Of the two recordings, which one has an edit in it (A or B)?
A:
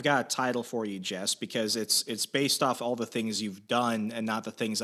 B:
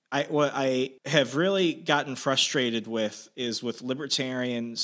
B